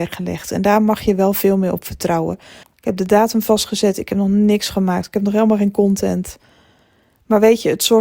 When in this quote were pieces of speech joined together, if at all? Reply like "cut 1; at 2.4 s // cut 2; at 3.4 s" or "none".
cut 1; at 2.6 s